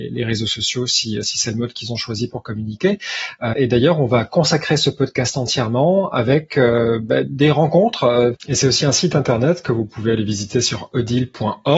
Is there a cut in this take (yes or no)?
yes